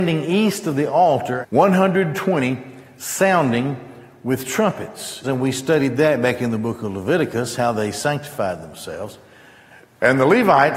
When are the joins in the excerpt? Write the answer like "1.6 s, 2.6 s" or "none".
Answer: 1.4 s, 5.2 s